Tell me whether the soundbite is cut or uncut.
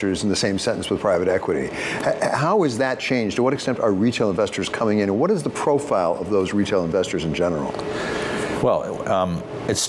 uncut